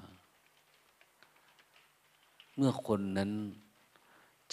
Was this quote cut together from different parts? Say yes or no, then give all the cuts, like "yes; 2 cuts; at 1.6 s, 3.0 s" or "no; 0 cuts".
yes; 1 cut; at 2.5 s